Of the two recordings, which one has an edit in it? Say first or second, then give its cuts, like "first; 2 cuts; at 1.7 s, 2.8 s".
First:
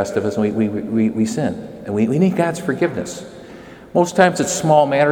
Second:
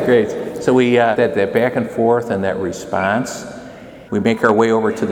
second; 2 cuts; at 1.2 s, 4.1 s